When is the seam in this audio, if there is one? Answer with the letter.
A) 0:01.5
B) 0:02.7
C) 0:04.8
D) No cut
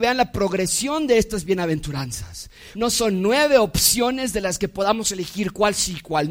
B